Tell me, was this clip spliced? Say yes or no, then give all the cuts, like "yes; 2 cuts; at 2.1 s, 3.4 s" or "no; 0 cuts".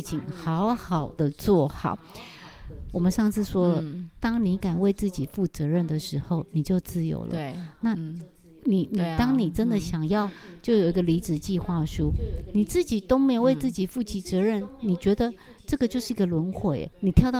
no; 0 cuts